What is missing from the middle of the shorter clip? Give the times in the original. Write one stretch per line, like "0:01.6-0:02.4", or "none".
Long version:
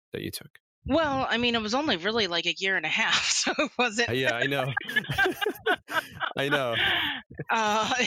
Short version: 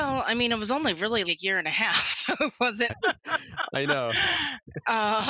0:02.3-0:02.4
0:04.1-0:05.5